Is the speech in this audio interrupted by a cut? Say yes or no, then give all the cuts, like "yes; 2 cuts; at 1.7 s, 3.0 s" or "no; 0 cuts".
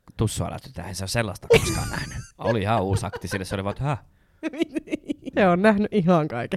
yes; 2 cuts; at 2.3 s, 5.3 s